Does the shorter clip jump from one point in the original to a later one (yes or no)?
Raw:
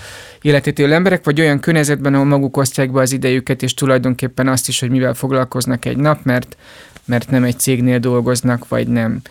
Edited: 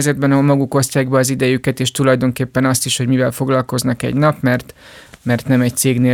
no